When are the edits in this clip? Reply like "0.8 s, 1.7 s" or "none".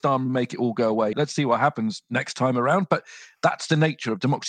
1.1 s

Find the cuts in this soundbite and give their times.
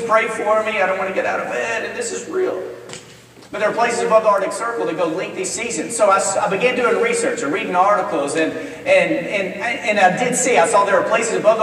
none

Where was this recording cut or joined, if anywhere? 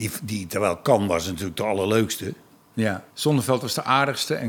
3.1 s

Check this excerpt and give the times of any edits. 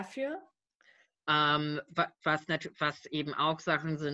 1.1 s

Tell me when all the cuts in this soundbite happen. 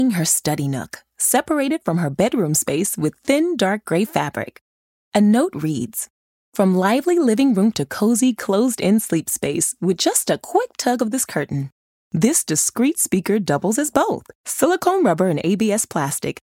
12.0 s

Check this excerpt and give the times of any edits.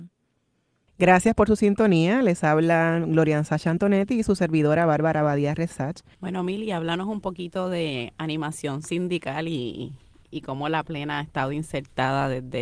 6.1 s

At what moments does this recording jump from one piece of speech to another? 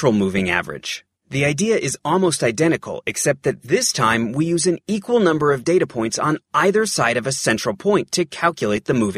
none

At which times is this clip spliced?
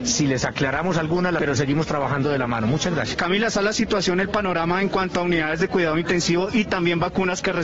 1.4 s, 3.1 s

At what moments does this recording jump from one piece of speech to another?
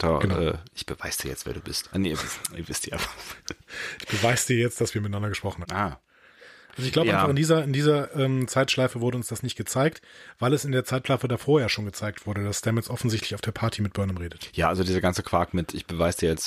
5.6 s

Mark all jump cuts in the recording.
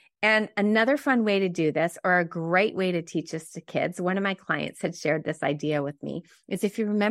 none

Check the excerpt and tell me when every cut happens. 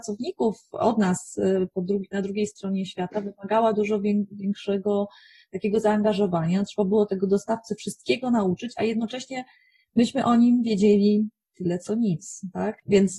none

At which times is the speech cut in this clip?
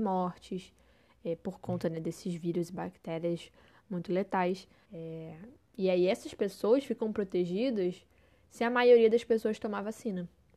4.8 s

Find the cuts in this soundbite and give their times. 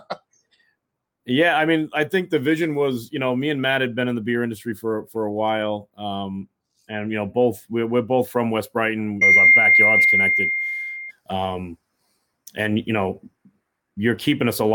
9.2 s, 11.1 s

